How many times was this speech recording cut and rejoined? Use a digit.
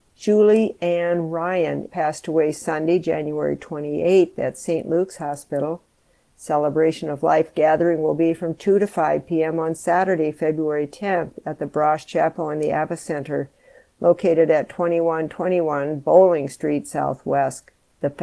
1